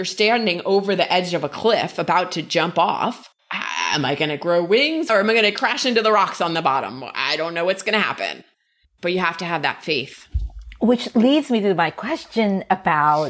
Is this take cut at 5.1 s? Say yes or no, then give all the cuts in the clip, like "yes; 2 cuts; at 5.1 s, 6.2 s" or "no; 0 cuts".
yes; 1 cut; at 5.1 s